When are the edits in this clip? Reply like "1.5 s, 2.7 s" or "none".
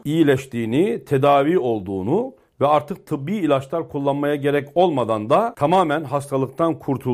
none

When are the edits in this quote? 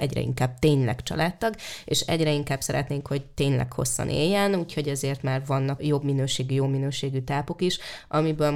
5.8 s

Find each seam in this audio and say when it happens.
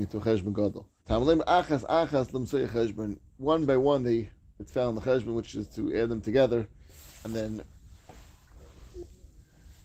1.0 s

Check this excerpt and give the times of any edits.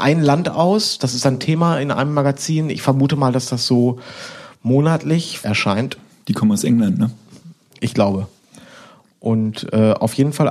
5.4 s

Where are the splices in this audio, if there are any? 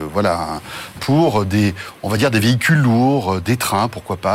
1.0 s

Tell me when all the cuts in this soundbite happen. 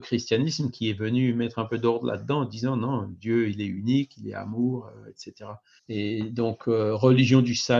5.8 s

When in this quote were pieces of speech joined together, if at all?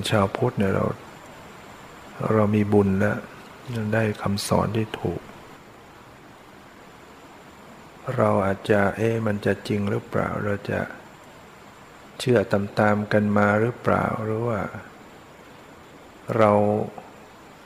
none

